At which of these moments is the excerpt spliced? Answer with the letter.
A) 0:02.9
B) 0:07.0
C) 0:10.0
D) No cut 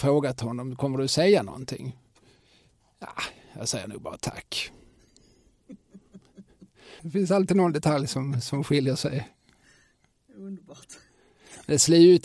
B